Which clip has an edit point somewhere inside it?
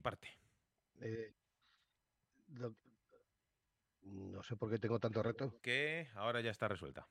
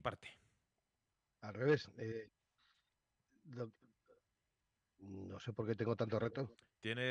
first; 2 cuts; at 1.0 s, 5.6 s

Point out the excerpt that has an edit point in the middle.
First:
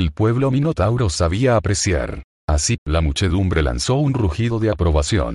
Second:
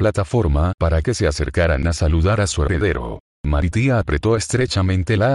first; 1 cut; at 2.8 s

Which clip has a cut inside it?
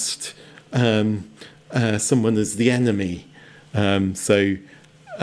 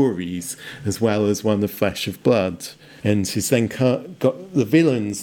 second; 1 cut; at 3.0 s

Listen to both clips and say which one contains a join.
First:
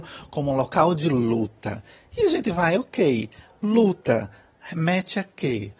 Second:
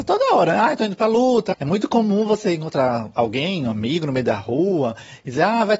second; 1 cut; at 1.5 s

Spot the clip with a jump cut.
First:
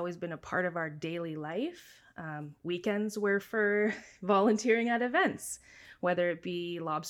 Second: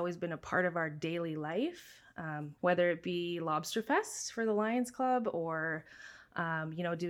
second; 1 cut; at 2.6 s

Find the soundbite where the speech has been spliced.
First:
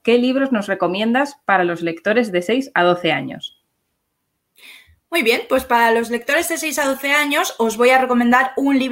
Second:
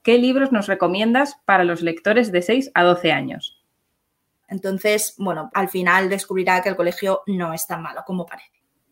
second; 2 cuts; at 4.4 s, 5.5 s

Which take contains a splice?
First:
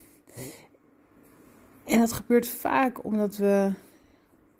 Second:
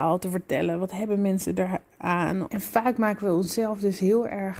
second; 1 cut; at 2.5 s

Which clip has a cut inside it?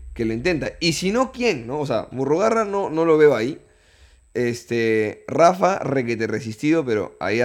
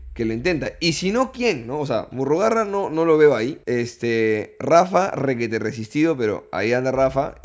second; 1 cut; at 3.6 s

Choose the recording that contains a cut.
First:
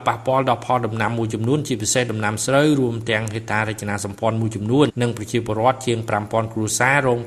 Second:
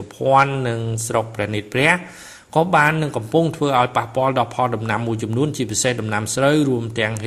first; 1 cut; at 4.9 s

